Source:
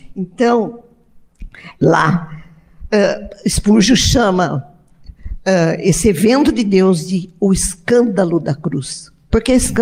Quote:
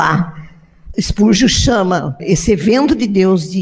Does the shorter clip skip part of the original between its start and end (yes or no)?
yes